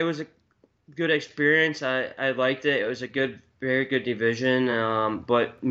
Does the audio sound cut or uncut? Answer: uncut